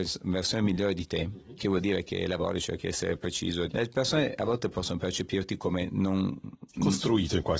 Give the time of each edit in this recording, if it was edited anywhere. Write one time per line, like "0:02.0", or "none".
0:03.7